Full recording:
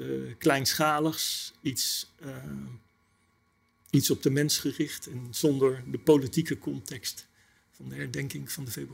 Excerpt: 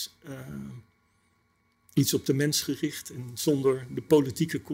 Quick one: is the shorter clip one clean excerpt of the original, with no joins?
yes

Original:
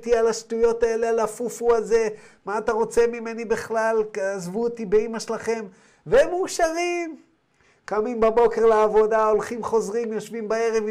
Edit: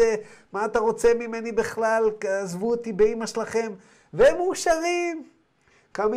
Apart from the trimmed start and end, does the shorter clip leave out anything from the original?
no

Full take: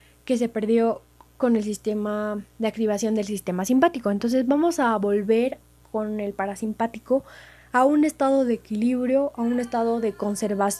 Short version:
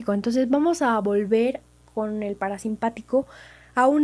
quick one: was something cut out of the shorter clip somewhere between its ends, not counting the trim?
no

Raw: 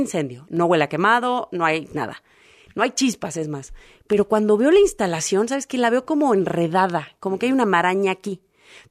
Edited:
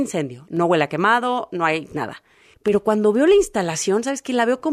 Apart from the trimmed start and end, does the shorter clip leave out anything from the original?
yes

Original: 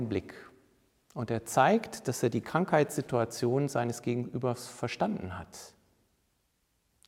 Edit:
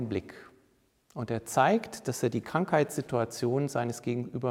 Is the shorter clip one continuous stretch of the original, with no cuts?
yes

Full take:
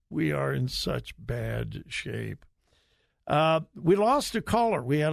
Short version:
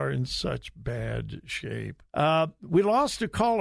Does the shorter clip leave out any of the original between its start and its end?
yes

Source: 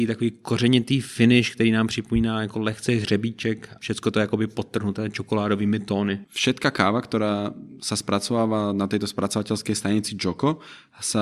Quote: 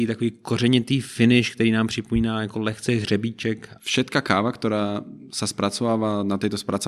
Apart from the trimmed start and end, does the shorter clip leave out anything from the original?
yes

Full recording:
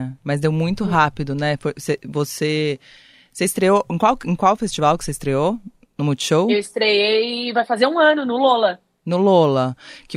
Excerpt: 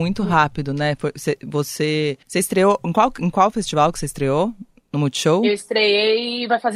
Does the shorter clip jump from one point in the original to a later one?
yes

